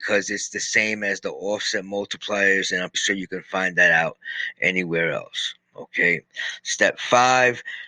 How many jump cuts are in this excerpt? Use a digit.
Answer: 1